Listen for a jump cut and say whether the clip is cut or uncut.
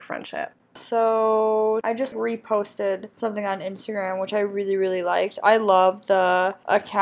uncut